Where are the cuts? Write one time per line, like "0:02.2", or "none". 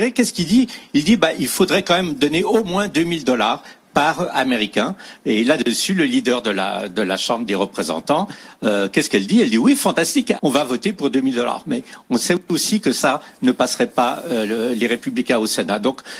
0:10.4